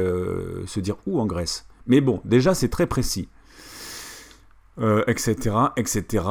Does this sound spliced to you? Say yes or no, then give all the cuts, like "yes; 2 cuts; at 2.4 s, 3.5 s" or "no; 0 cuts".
no; 0 cuts